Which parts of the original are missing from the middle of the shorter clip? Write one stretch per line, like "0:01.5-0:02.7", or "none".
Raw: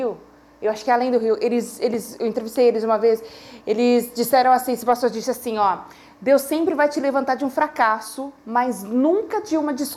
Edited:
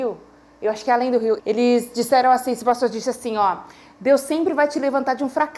0:01.4-0:03.6